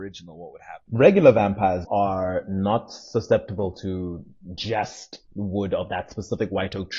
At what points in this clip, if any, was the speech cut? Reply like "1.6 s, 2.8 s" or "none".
1.8 s